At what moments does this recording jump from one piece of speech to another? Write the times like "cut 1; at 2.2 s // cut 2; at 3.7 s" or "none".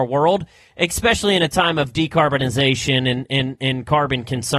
none

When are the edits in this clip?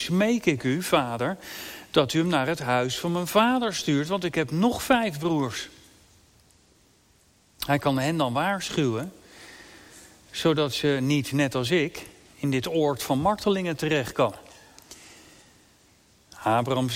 none

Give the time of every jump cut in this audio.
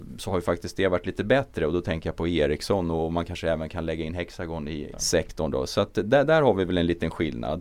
cut 1; at 4.9 s

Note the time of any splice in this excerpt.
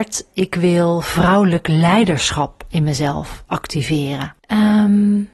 cut 1; at 4.4 s

